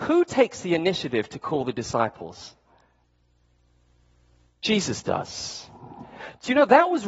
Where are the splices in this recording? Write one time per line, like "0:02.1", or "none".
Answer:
none